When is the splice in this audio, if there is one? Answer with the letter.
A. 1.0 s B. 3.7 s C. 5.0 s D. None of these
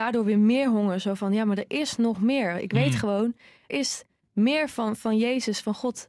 B